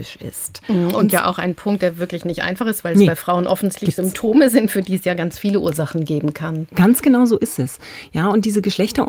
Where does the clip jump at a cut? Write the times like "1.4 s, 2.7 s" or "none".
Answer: none